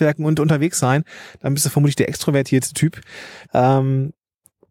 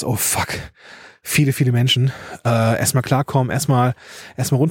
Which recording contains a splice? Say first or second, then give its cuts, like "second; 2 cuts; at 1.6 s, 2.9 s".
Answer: first; 1 cut; at 3.5 s